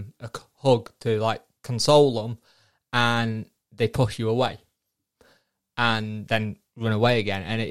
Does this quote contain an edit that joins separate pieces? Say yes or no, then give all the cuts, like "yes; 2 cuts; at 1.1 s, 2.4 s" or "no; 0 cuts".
no; 0 cuts